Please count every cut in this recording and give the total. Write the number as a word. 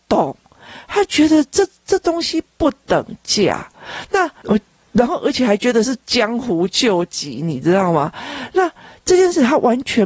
one